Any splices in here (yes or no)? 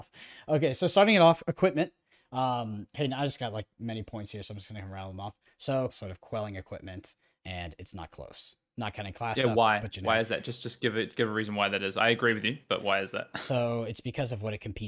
yes